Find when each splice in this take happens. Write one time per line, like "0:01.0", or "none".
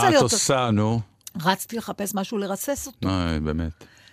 none